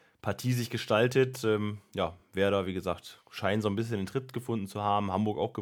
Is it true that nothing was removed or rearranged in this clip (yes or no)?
yes